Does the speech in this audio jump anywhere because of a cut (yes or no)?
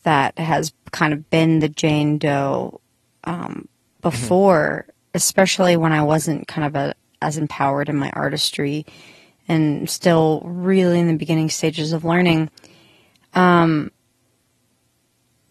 no